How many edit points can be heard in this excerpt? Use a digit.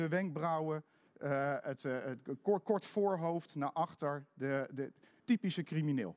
1